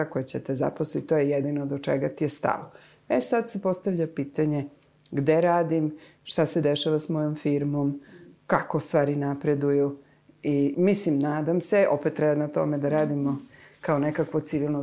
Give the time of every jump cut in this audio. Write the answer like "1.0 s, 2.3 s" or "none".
10.7 s